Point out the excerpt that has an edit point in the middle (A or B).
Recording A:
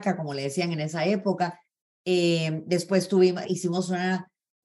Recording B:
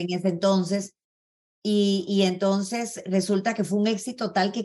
A